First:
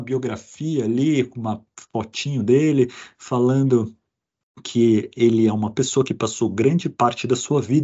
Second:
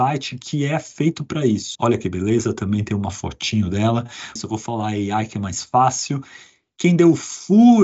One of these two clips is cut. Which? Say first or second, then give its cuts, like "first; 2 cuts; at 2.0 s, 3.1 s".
second; 2 cuts; at 1.8 s, 4.4 s